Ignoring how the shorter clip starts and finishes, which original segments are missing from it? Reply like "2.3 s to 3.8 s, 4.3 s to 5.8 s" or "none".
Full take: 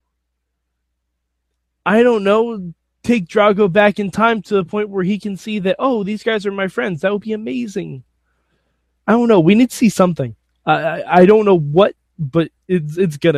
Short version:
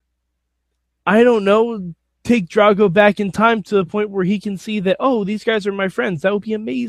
none

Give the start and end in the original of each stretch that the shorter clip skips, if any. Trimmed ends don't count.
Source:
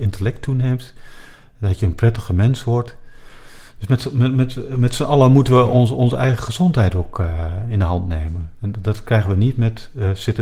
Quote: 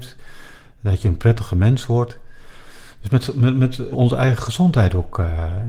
4.7 s to 5.9 s

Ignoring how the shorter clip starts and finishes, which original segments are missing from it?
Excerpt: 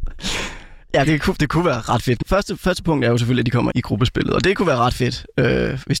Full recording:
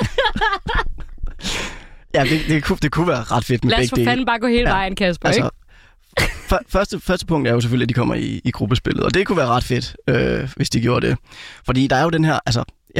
2.2 s to 2.5 s, 3.6 s to 6.7 s, 8.1 s to 8.4 s

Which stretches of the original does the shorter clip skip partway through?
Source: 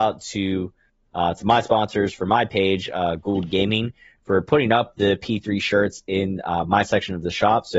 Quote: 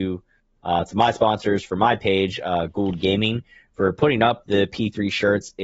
none

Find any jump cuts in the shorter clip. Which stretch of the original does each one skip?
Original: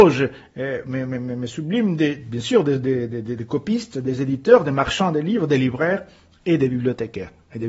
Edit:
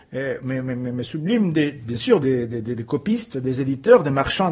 2.6 s to 2.8 s

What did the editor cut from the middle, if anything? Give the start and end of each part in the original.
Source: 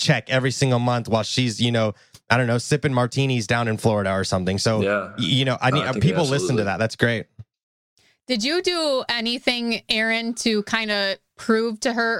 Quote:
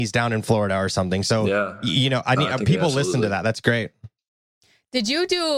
none

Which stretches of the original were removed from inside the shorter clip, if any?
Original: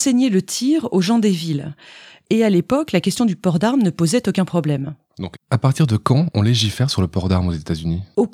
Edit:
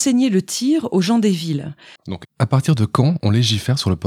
2.0 s to 5.1 s

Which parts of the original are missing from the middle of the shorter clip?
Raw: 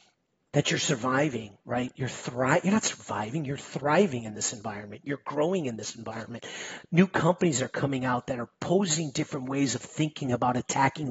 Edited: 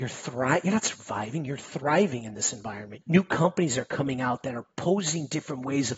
5.0 s to 6.9 s

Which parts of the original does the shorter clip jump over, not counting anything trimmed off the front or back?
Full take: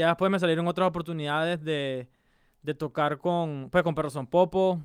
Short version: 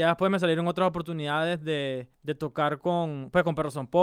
2.1 s to 2.5 s

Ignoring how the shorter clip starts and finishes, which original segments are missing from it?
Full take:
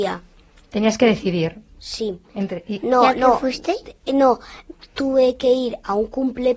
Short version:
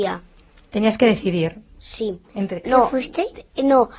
2.6 s to 3.1 s

